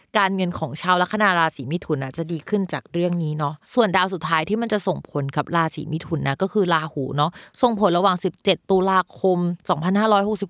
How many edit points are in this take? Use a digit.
1